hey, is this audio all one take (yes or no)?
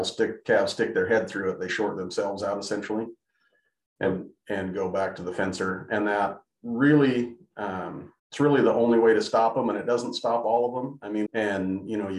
no